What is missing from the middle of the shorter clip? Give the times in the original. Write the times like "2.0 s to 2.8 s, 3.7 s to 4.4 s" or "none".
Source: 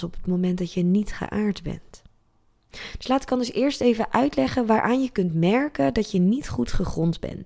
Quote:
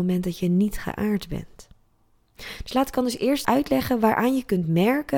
3.8 s to 4.1 s